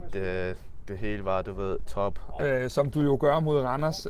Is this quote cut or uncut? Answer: cut